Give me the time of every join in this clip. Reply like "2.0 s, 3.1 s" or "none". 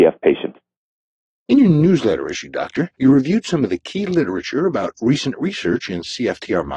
none